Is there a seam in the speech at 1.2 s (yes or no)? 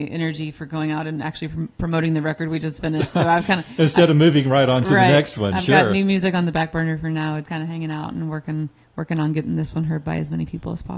no